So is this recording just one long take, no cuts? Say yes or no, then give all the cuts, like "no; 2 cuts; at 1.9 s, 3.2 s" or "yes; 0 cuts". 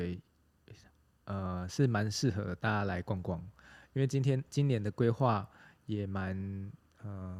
yes; 0 cuts